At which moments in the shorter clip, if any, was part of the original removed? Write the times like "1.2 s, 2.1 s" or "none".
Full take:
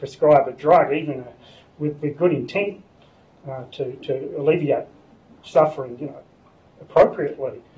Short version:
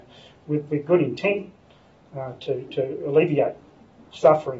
none